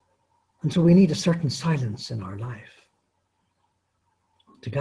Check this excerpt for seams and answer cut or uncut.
uncut